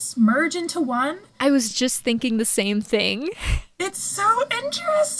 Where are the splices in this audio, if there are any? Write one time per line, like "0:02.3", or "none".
none